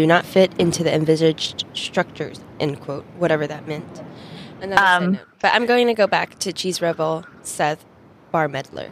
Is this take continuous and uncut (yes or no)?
no